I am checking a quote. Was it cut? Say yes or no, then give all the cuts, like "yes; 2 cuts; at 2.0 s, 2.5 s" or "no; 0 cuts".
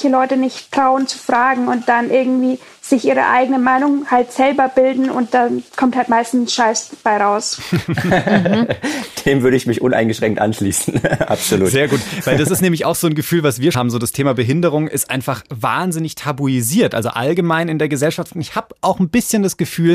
yes; 1 cut; at 13.7 s